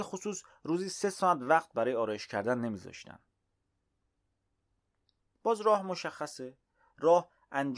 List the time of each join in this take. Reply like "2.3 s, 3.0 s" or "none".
5.4 s